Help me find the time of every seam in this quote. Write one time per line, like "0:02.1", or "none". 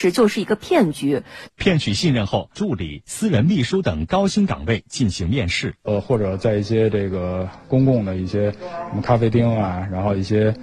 0:01.5
0:02.5
0:05.8